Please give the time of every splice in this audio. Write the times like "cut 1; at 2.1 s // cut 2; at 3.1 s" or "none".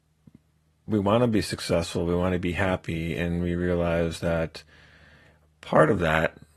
none